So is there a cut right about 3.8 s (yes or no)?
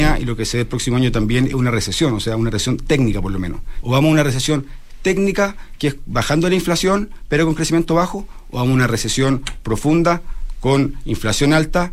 yes